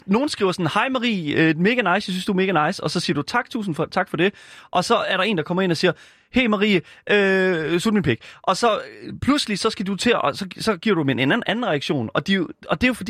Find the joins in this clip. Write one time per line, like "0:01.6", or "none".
none